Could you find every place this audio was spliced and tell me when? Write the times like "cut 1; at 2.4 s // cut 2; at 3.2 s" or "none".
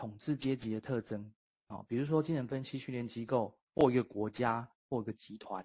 none